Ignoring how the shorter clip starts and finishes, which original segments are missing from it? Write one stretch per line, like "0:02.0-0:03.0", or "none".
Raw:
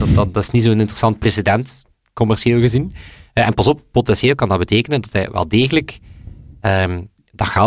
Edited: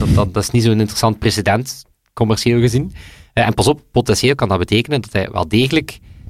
none